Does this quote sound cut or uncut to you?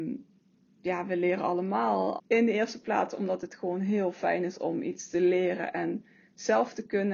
cut